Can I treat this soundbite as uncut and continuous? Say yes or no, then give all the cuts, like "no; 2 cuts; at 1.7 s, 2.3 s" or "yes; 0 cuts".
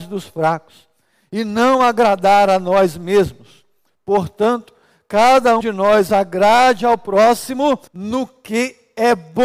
no; 2 cuts; at 5.6 s, 7.9 s